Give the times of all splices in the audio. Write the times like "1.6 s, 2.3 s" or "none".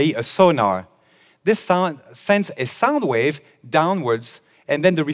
none